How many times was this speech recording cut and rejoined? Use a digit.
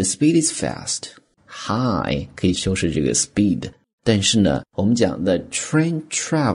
3